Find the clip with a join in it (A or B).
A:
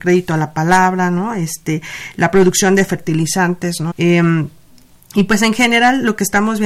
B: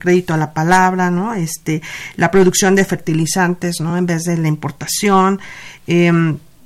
A